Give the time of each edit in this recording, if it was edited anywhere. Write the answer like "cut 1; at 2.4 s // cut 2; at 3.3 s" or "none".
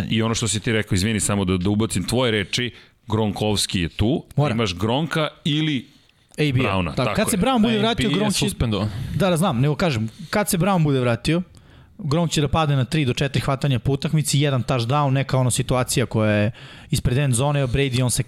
none

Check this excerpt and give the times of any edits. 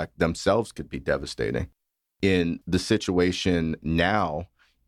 none

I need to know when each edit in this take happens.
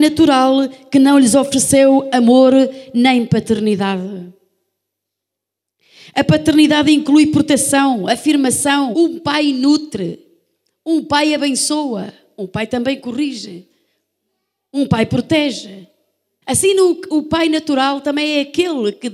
cut 1; at 8.9 s // cut 2; at 16.4 s

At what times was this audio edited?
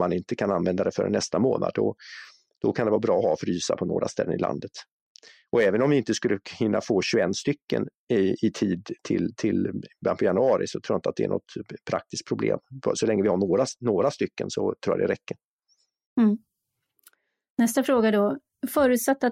none

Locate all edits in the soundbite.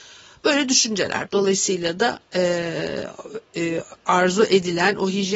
cut 1; at 1.3 s

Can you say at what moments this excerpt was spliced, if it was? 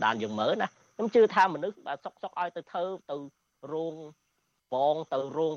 none

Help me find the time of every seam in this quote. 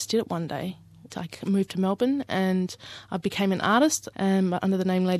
cut 1; at 1.1 s // cut 2; at 4.1 s

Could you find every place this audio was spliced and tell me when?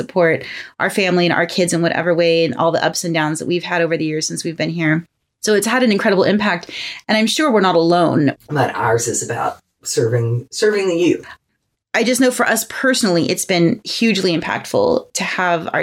cut 1; at 8.3 s

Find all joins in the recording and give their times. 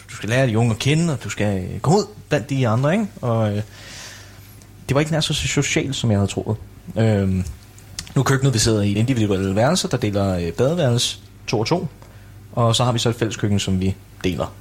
cut 1; at 9.0 s

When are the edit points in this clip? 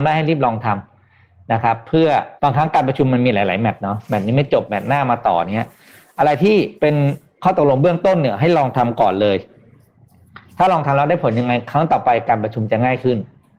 cut 1; at 2.4 s // cut 2; at 6.8 s

